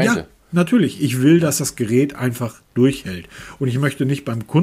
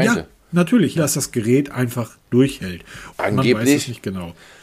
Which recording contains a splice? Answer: second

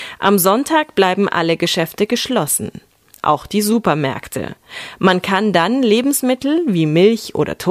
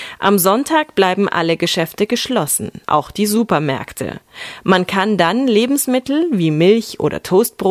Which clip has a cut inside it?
second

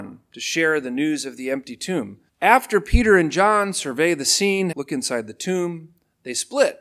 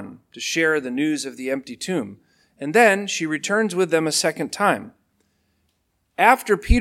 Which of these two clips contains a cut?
first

